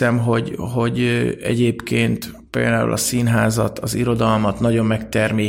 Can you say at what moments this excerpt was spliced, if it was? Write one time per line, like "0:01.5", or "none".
0:02.5